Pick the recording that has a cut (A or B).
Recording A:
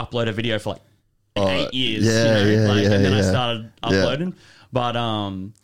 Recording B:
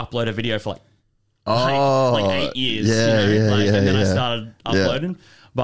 A